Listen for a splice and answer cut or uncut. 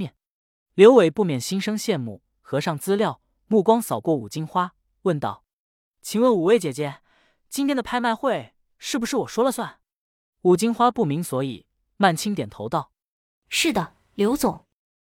uncut